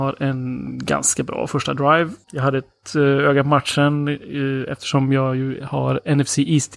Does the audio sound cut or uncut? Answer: cut